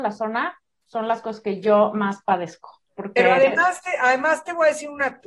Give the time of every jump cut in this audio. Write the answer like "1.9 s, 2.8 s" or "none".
none